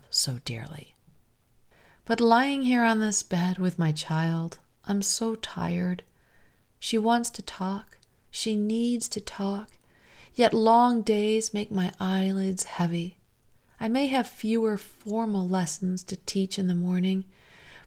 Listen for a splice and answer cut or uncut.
uncut